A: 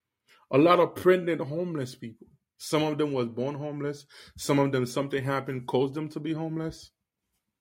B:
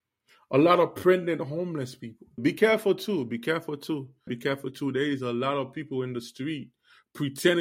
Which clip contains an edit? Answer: B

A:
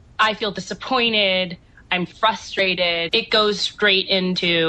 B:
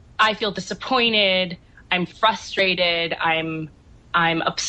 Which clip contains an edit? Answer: A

